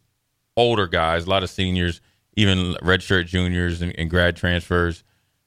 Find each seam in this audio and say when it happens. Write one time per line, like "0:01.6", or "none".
none